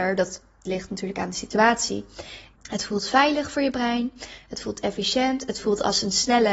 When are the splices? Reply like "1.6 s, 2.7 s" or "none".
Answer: 2.5 s

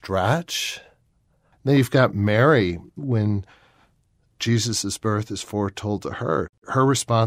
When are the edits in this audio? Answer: 1.5 s

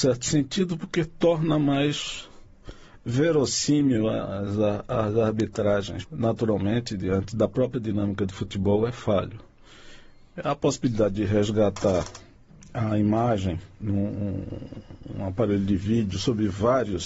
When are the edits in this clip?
6.0 s

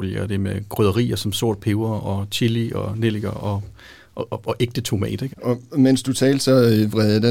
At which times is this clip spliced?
5.3 s

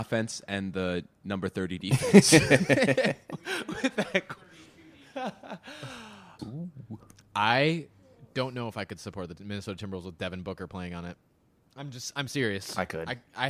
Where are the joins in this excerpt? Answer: 6.4 s

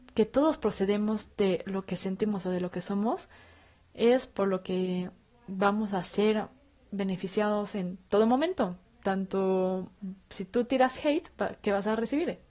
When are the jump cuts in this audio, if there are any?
none

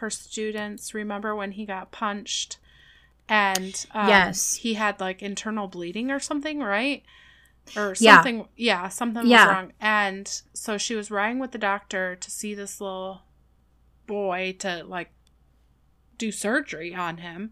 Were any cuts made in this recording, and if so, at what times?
none

